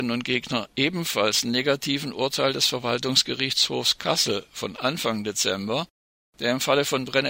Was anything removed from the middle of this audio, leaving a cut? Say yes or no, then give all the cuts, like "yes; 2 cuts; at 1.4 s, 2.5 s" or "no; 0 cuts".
no; 0 cuts